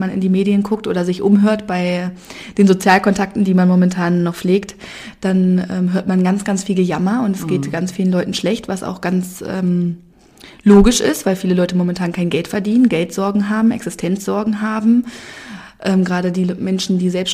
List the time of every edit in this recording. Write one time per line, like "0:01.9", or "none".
none

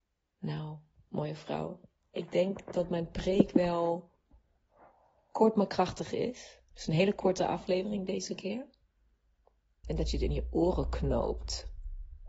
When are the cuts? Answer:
0:09.8

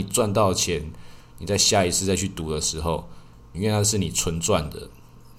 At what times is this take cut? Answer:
0:03.5

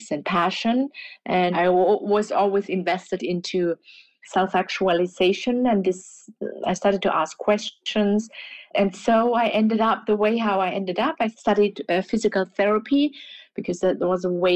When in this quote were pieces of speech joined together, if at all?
none

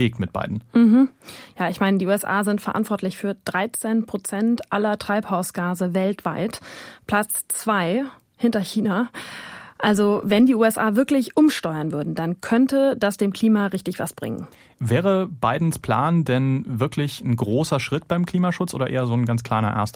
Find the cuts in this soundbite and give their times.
none

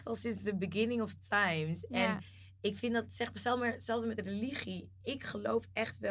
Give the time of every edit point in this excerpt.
none

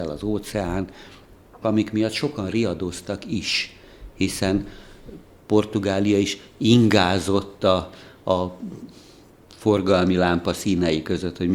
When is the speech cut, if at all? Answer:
0:01.6

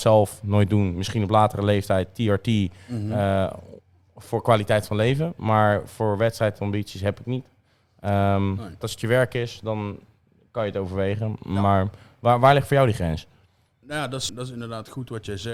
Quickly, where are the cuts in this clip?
0:08.8
0:14.3

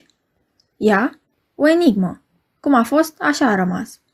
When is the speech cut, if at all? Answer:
0:01.3

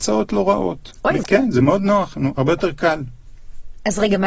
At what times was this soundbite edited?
0:01.2

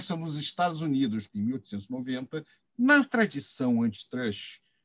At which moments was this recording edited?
0:01.3
0:02.7

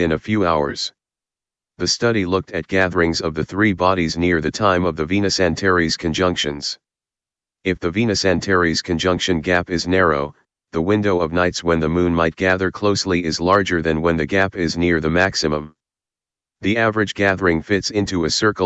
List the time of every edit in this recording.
none

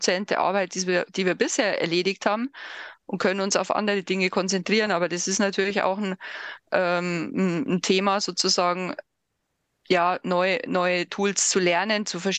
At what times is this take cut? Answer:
none

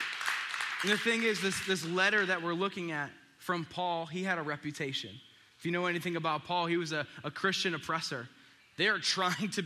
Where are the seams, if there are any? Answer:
0:08.6

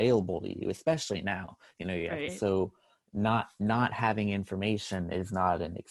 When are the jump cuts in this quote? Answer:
0:02.3

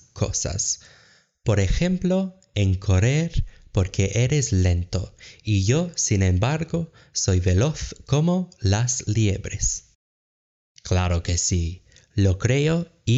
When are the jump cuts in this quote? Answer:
0:10.7

